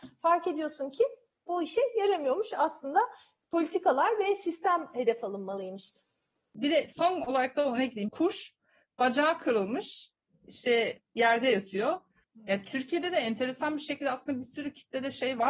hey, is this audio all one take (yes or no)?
no